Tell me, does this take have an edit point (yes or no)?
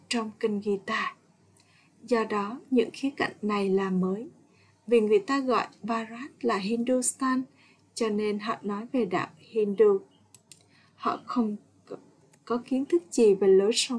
no